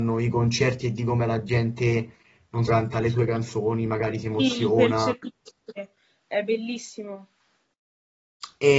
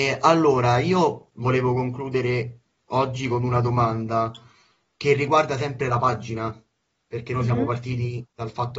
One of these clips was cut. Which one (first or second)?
first